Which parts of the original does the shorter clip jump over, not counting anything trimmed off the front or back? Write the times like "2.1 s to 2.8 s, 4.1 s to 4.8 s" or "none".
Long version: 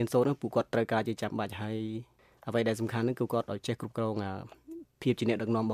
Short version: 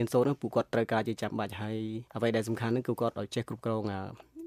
2.1 s to 2.4 s